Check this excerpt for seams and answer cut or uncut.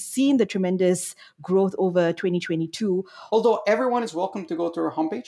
cut